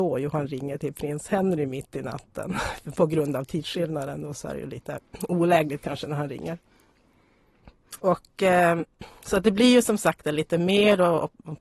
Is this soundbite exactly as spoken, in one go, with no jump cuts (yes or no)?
no